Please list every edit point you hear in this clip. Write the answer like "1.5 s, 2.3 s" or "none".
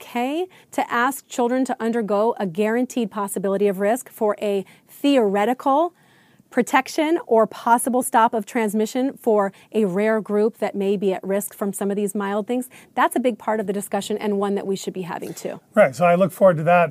none

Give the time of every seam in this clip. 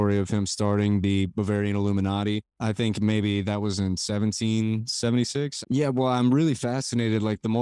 2.5 s, 5.6 s

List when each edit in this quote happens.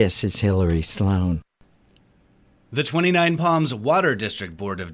none

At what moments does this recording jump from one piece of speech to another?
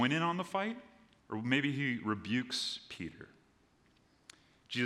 1.2 s

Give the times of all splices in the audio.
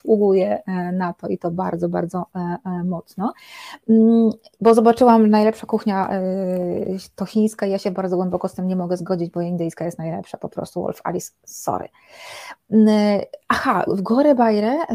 4.6 s, 13.9 s

